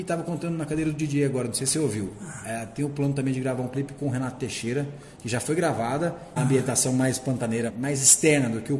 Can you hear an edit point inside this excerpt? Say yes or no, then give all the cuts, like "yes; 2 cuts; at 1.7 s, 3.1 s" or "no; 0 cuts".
yes; 3 cuts; at 5.2 s, 6.4 s, 7.7 s